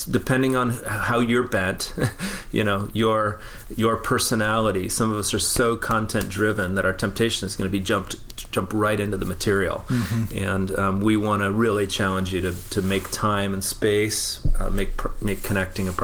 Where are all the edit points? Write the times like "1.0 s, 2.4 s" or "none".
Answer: none